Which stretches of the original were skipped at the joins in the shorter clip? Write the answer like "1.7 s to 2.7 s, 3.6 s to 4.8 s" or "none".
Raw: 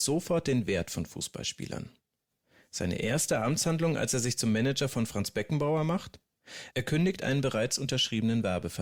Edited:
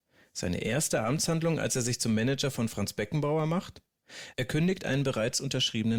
none